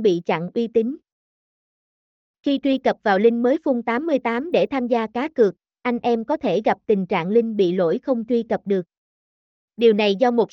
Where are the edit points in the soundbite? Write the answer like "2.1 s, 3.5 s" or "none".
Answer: none